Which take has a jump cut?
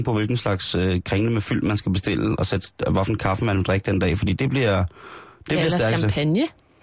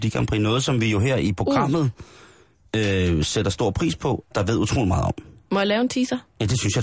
second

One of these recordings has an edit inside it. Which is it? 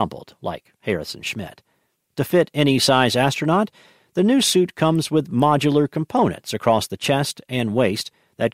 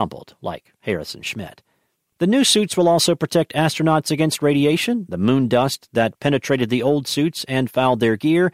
first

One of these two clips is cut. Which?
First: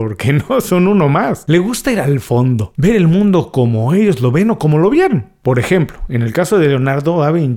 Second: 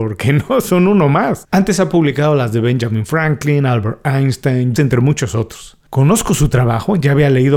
second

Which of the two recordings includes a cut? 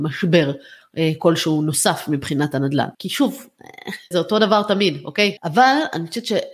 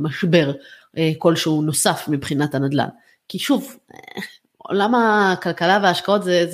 first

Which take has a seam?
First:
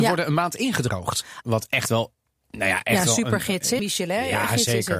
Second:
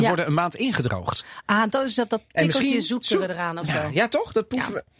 first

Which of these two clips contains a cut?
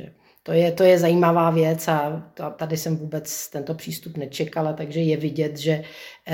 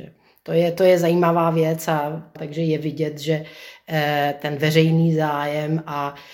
second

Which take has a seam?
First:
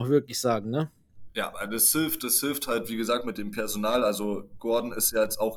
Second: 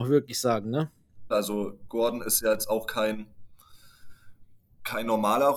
second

